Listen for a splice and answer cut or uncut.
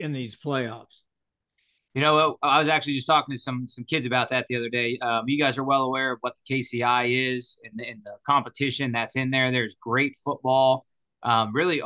uncut